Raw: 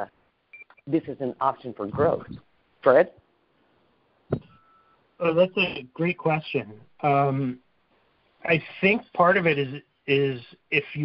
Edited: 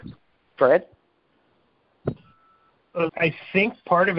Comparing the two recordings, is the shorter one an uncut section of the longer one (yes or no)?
no